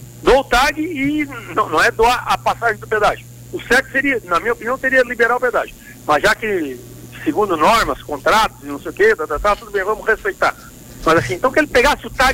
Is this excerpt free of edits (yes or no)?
yes